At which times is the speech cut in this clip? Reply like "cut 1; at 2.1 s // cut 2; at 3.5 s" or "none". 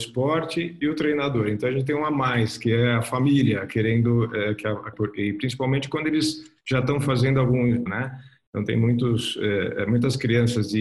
cut 1; at 4.9 s // cut 2; at 7.9 s